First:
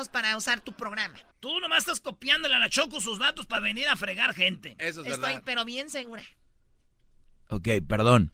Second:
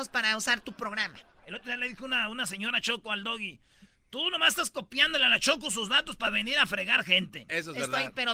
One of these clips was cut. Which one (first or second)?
first